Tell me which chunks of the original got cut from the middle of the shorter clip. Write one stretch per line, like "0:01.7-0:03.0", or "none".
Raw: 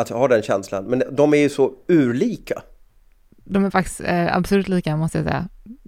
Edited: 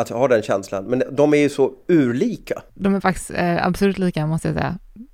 0:02.7-0:03.4